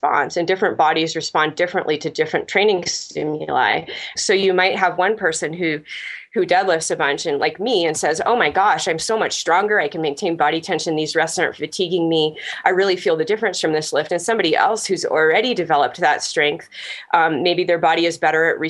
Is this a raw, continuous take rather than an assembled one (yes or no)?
no